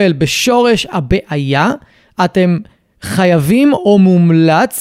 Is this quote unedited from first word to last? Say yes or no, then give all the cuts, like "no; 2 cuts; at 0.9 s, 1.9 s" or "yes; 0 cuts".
yes; 0 cuts